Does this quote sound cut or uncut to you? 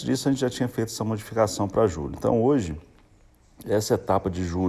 uncut